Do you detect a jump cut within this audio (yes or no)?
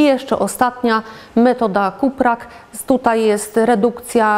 no